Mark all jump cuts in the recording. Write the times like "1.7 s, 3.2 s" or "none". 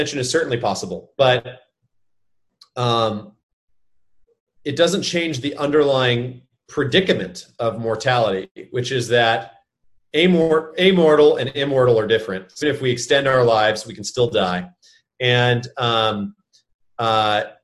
12.6 s